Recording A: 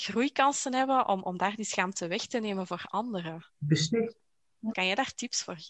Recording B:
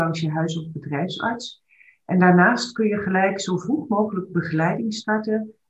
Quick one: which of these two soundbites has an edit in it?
A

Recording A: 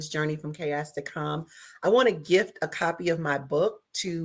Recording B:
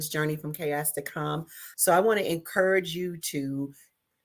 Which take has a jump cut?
B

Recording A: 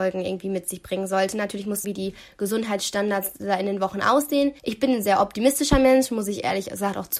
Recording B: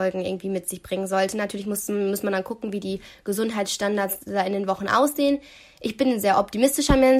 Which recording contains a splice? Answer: A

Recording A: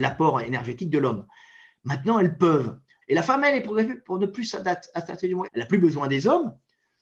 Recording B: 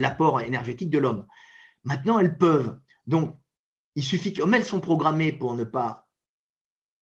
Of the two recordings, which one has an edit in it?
A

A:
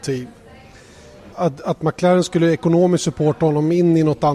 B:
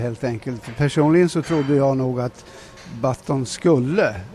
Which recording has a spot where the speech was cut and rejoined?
A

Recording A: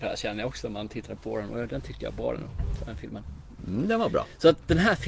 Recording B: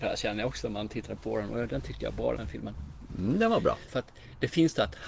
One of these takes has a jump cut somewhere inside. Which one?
B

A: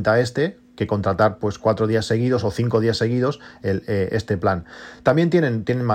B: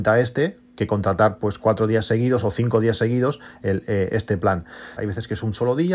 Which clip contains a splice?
B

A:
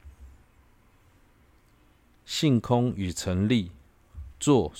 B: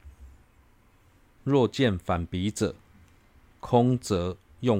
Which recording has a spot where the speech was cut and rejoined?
B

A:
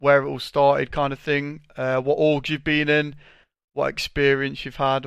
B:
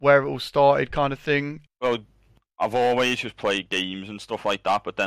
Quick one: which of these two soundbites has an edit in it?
B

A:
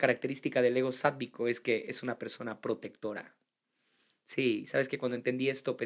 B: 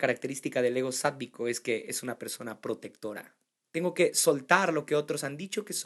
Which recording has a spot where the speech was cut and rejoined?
B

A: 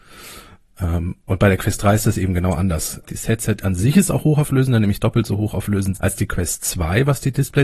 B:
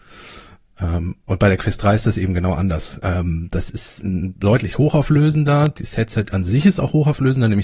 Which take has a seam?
A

